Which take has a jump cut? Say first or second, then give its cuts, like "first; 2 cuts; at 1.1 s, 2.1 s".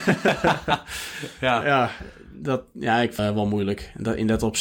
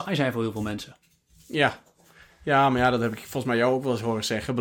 first; 1 cut; at 3.2 s